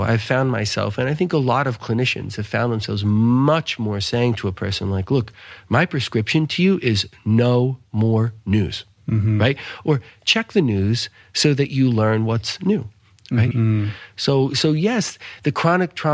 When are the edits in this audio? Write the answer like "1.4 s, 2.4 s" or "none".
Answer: 13.5 s